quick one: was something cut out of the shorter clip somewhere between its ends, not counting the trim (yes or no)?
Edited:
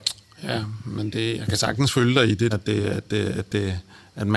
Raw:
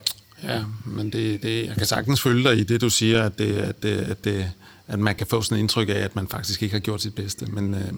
yes